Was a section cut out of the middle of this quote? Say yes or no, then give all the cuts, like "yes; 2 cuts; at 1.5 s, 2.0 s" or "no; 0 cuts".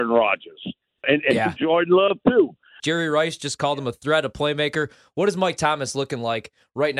yes; 2 cuts; at 1.0 s, 2.8 s